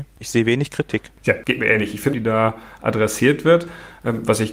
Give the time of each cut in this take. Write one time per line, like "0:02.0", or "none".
0:02.1